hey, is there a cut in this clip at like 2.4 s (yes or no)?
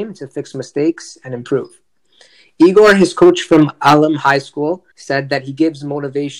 no